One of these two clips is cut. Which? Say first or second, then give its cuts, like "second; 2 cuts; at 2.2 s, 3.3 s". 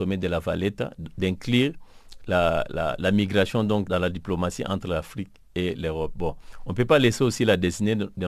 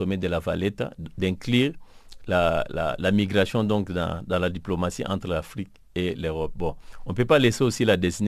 first; 1 cut; at 3.9 s